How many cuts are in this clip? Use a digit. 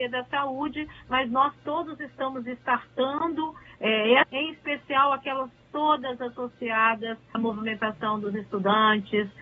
2